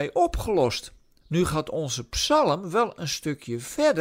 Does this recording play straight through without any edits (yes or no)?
no